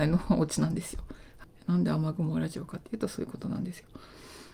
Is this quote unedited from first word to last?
yes; 0 cuts

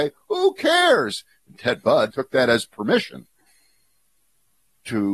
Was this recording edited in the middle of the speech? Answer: yes; 1 cut; at 2.1 s

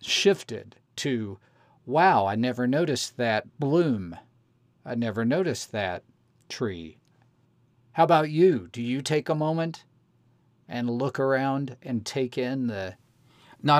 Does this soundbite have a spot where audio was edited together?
no; 0 cuts

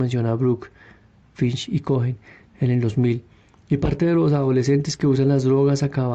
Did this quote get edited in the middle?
yes; 1 cut; at 1.2 s

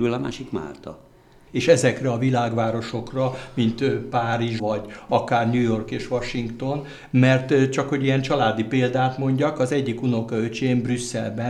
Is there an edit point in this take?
yes; 2 cuts; at 1.5 s, 4.6 s

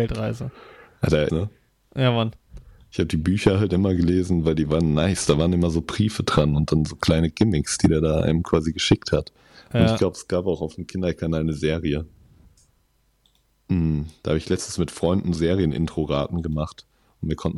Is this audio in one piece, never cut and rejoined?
no; 2 cuts; at 1.3 s, 15.4 s

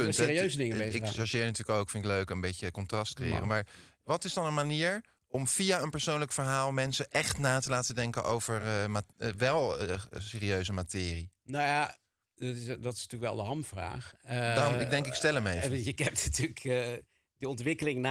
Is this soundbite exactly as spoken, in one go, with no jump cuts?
yes; 0 cuts

